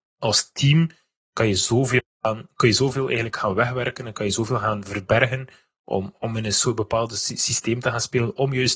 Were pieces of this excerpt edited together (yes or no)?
no